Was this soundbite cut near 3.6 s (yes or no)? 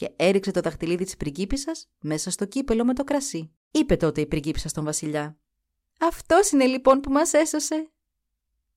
yes